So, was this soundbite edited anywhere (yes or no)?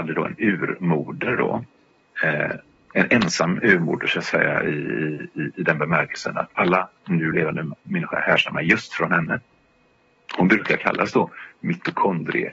no